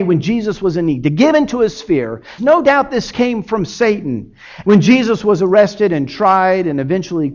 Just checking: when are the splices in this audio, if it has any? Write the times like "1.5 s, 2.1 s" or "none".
2.4 s, 4.6 s